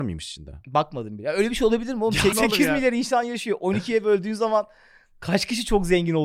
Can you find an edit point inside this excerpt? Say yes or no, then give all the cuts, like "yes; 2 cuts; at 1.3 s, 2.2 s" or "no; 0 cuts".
yes; 1 cut; at 2.3 s